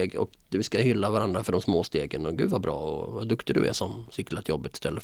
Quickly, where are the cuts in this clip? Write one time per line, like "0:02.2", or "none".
none